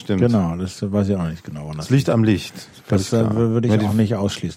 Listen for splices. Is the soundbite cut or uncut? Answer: uncut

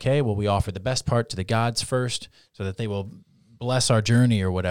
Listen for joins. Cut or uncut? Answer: uncut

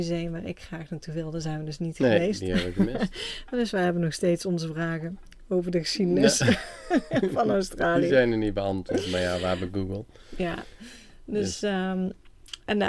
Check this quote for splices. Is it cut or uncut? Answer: uncut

